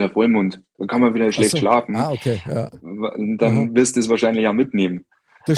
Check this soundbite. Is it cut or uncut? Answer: uncut